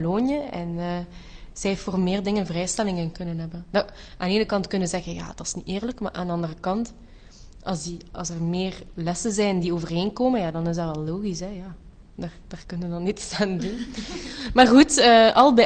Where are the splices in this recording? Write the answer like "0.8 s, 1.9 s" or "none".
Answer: none